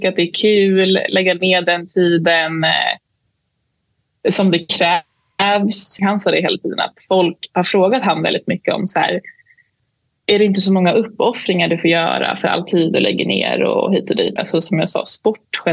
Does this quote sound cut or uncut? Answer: cut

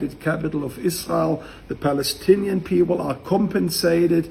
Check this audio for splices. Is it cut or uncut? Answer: uncut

